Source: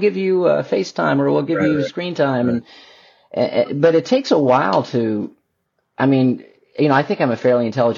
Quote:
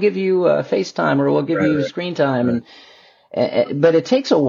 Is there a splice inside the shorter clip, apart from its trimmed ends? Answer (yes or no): no